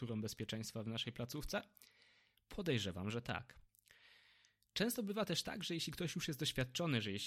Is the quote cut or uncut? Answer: uncut